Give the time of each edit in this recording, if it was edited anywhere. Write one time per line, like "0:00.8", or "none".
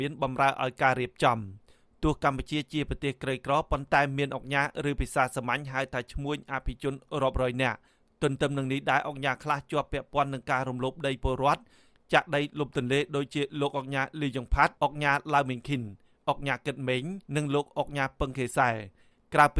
0:14.8
0:17.3